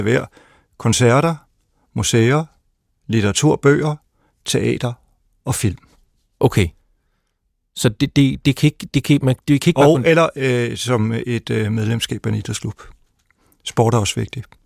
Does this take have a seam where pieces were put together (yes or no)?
no